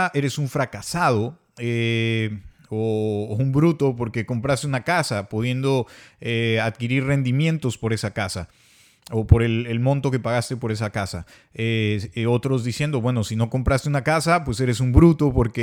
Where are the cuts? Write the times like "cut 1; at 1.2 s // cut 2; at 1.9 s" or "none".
none